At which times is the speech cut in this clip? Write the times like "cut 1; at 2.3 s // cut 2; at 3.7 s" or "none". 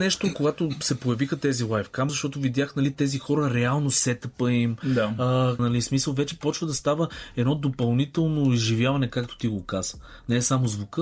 cut 1; at 2.1 s // cut 2; at 5.6 s